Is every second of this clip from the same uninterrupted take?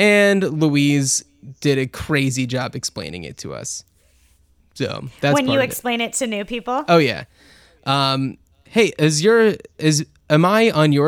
yes; 0 cuts

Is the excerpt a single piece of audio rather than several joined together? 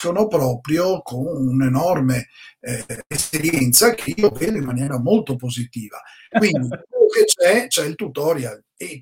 no; 1 cut; at 6.3 s

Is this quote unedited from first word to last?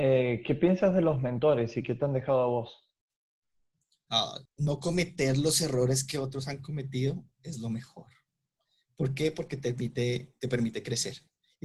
no; 2 cuts; at 4.5 s, 7.3 s

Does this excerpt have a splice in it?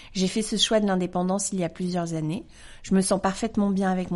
no; 0 cuts

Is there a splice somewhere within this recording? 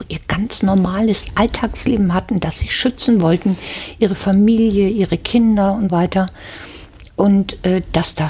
yes; 1 cut; at 5.9 s

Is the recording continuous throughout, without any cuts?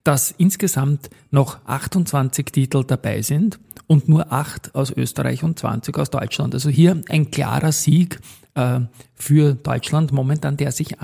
yes; 0 cuts

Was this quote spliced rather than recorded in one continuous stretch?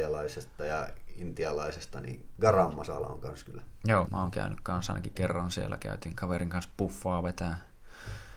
yes; 1 cut; at 4.1 s

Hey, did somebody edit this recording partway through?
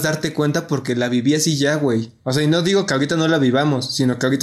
no; 0 cuts

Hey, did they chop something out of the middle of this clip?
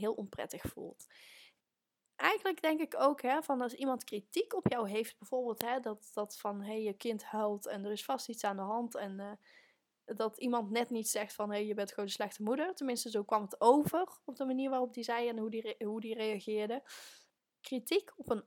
no; 0 cuts

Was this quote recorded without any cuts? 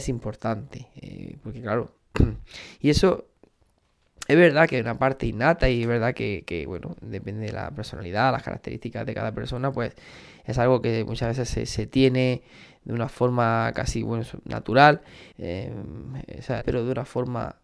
no; 2 cuts; at 15.3 s, 16.6 s

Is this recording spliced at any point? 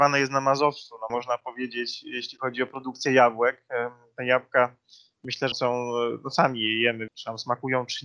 yes; 3 cuts; at 1.1 s, 5.5 s, 7.1 s

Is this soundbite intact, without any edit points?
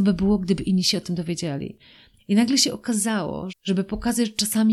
no; 2 cuts; at 2.2 s, 3.5 s

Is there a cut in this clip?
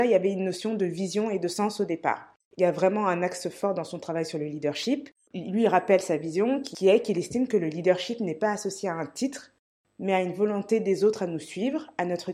no; 0 cuts

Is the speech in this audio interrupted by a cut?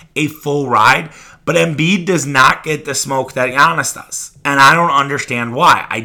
no; 0 cuts

